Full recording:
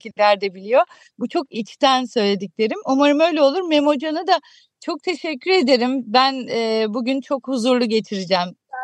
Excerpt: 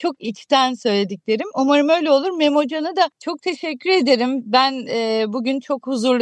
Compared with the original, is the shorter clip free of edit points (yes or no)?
no